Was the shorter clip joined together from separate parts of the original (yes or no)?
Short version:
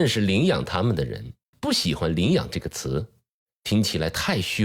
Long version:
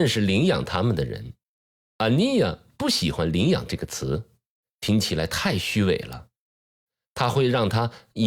yes